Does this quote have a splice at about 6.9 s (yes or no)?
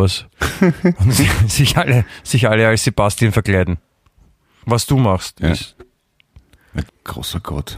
yes